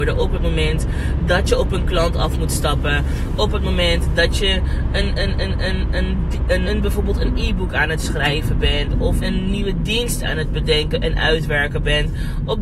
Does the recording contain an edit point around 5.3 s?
no; 2 cuts; at 6.6 s, 9.2 s

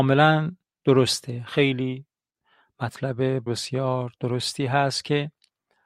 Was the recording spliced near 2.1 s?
no; 1 cut; at 3.5 s

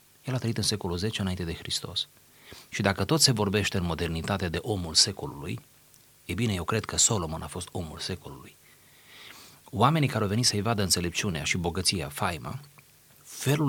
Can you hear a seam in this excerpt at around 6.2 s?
no; 0 cuts

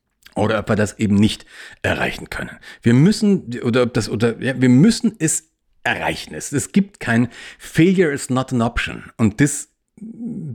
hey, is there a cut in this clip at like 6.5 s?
no; 1 cut; at 4.5 s

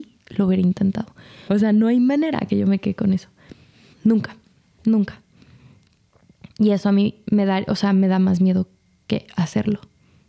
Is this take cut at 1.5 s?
yes; 2 cuts; at 1.5 s, 3.9 s

